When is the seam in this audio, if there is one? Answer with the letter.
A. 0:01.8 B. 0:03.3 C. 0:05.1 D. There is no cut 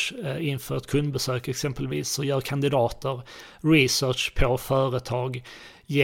D